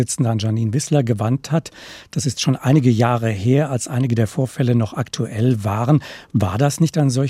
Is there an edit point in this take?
no; 0 cuts

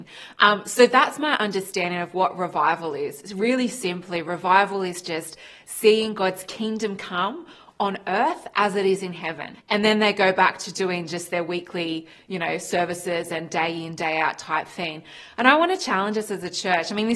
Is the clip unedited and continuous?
no; 1 cut; at 9.5 s

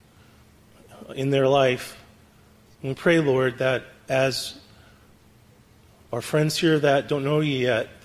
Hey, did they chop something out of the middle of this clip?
yes; 1 cut; at 2.7 s

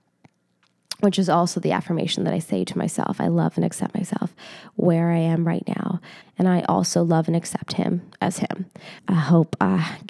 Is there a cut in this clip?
yes; 2 cuts; at 6.2 s, 9.0 s

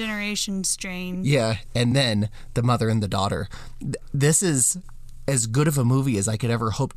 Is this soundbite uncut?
yes; 0 cuts

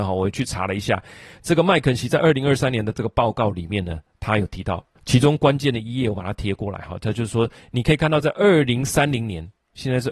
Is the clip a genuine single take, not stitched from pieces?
yes; 0 cuts

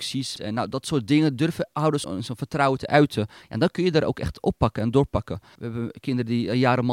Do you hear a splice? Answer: yes; 2 cuts; at 2.0 s, 5.6 s

